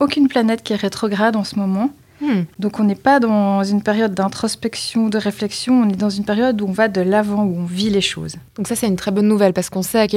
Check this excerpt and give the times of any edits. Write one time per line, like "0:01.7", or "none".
0:02.5
0:08.5